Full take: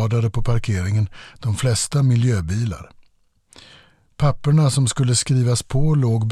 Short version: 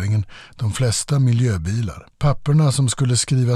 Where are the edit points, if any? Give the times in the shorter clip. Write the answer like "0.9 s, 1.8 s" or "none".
2.1 s